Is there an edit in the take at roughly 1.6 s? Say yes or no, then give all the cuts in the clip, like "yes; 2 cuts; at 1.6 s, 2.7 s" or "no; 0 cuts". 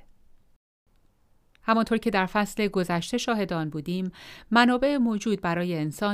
yes; 1 cut; at 1.6 s